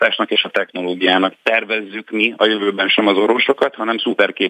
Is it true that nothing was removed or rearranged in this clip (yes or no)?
no